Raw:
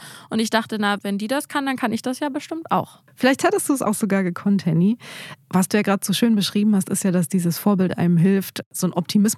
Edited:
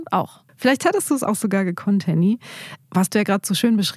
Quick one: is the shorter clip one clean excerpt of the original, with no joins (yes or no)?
yes